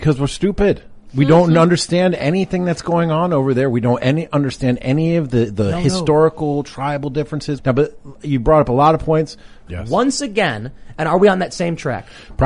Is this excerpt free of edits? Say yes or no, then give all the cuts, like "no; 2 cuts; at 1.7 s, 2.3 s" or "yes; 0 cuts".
no; 2 cuts; at 7.6 s, 9.7 s